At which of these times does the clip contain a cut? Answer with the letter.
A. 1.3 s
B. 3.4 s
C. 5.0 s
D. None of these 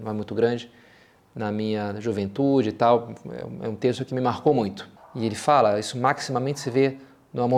C